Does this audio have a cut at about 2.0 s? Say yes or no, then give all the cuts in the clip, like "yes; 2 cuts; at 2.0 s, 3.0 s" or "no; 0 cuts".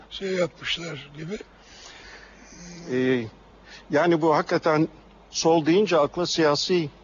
yes; 1 cut; at 2.0 s